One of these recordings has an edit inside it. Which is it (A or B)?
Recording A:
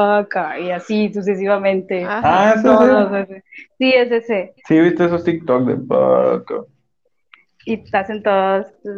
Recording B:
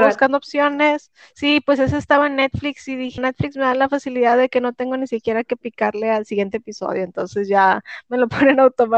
B